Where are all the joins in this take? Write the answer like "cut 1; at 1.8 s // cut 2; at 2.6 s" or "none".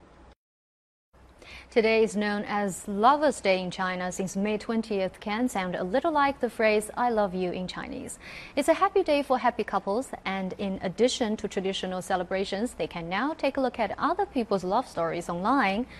none